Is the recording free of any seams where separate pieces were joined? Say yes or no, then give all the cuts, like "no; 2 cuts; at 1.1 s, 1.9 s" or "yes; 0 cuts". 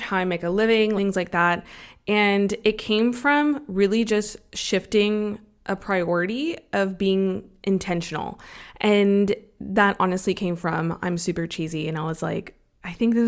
no; 1 cut; at 1.0 s